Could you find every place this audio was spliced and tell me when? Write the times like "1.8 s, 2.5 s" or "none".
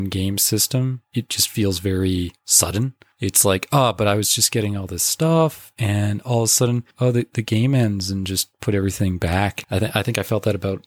9.6 s